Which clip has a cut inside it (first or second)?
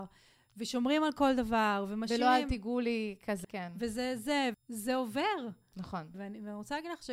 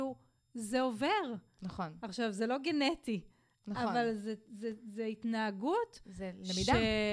first